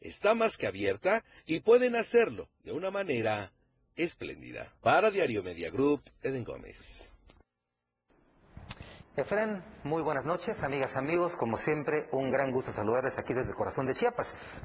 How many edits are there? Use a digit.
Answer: 2